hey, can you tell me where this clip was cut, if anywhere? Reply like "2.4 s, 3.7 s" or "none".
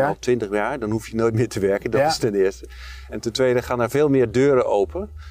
none